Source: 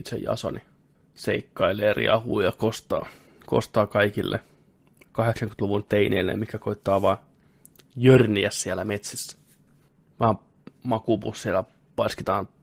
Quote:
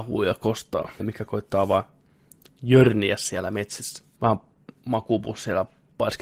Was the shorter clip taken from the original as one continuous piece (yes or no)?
no